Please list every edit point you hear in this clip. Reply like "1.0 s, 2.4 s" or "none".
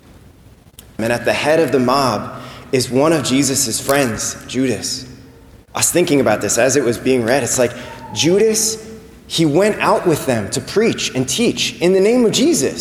1.0 s

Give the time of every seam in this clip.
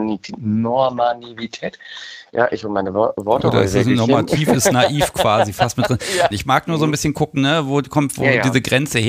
6.3 s

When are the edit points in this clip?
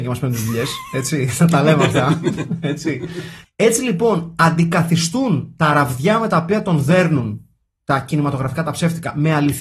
3.4 s

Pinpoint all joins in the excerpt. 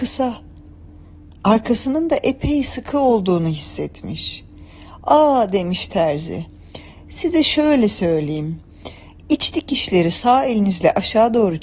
none

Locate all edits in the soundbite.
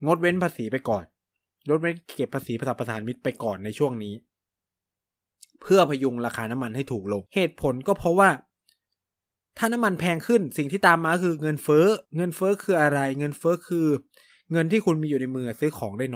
7.3 s, 12.1 s

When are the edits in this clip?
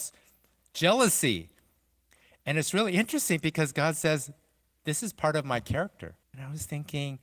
6.2 s

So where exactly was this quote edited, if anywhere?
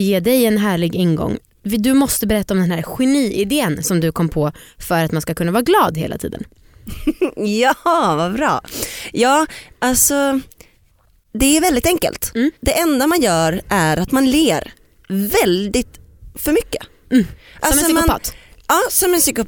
12.6 s

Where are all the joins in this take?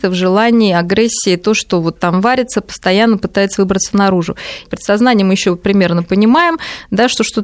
4.6 s

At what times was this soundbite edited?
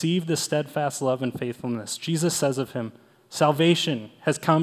none

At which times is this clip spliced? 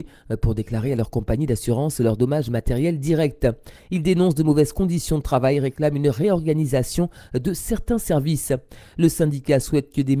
3.8 s

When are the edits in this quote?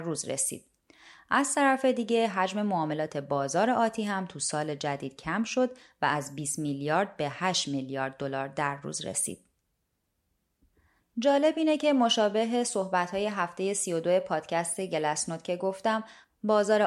11.0 s

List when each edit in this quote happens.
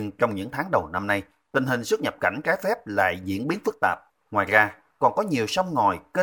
4.1 s

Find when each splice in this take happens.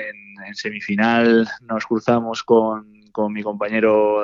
none

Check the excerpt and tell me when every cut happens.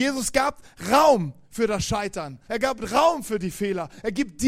2.5 s

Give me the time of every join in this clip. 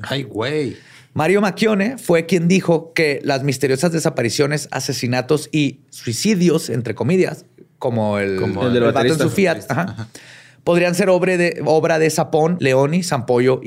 12.6 s

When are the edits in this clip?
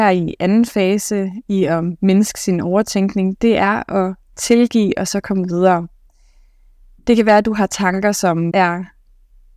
8.5 s

